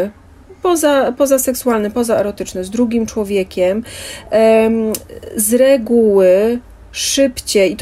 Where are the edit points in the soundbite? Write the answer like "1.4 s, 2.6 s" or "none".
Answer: none